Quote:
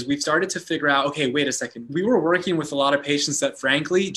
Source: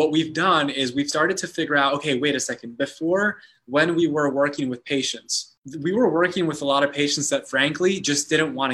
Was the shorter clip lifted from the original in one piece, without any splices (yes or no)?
no